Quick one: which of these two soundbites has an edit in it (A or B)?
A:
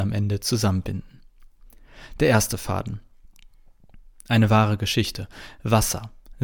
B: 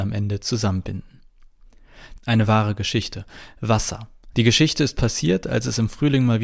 B